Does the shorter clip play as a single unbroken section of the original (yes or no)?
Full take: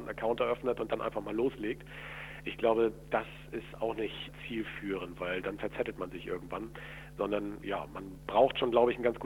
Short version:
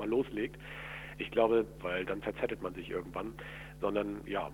no